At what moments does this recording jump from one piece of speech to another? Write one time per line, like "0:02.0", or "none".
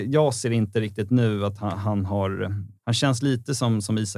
0:02.8